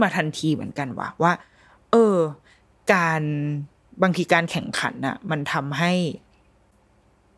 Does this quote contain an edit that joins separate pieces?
no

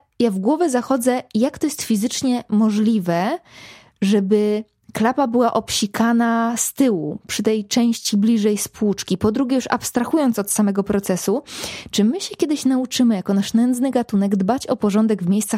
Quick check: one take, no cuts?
yes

